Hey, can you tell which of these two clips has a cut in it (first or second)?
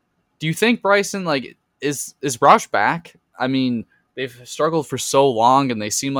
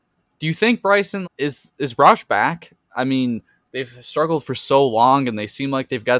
second